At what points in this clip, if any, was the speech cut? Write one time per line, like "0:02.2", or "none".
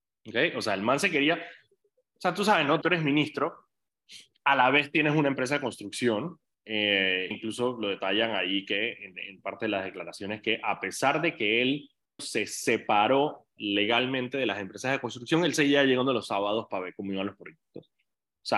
0:02.8
0:07.3
0:12.2

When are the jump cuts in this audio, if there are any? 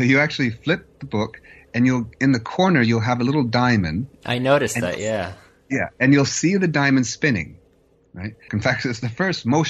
0:08.5

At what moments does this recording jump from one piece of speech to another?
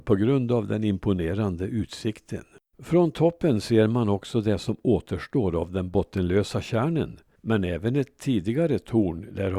0:02.7
0:07.4

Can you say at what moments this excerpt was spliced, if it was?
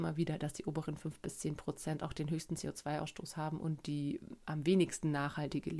none

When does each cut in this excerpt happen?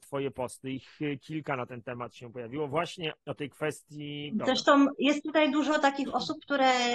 0:03.2
0:04.4

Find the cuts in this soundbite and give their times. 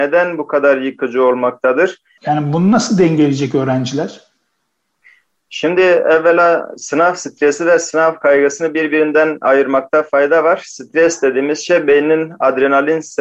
0:02.2

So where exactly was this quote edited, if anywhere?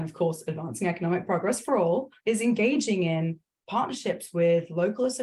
0:02.2

